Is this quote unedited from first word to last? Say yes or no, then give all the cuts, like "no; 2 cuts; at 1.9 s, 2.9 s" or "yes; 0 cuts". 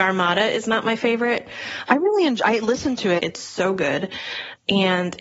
no; 2 cuts; at 1.9 s, 3.2 s